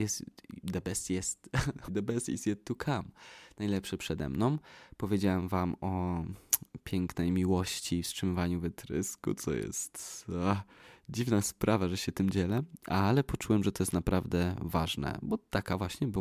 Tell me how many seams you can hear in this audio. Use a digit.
1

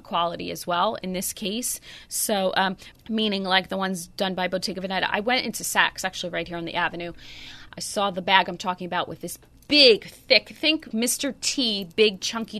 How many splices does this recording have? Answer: 3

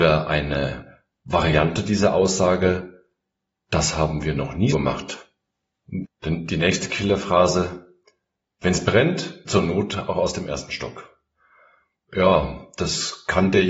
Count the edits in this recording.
3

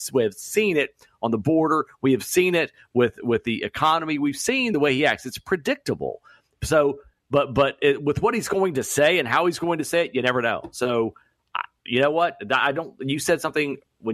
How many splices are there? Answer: 0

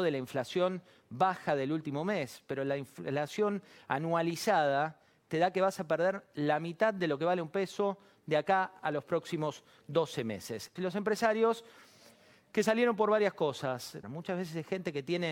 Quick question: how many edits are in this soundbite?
2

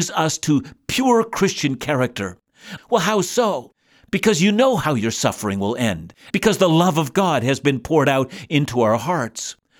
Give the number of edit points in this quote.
2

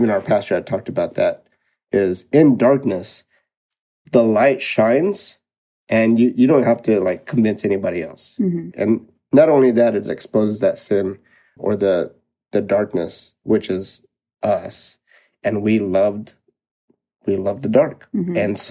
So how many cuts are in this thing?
2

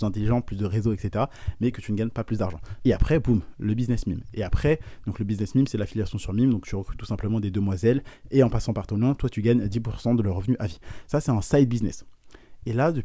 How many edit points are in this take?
1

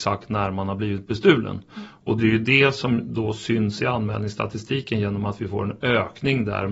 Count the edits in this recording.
0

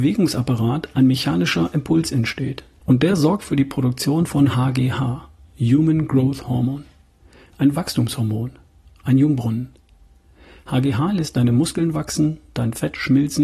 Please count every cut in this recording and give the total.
1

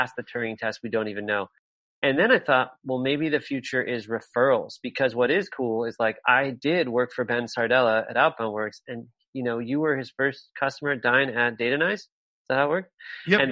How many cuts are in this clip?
0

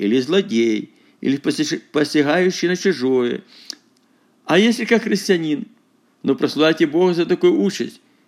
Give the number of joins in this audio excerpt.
1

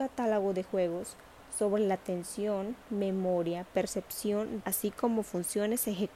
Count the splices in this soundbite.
1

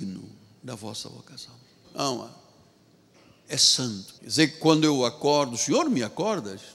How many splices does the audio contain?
2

